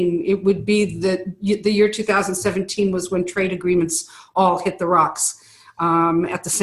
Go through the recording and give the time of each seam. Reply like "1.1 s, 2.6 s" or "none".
none